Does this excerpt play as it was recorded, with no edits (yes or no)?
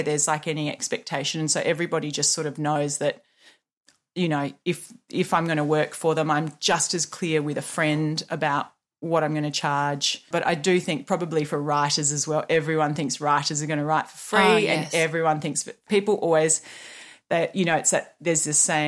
no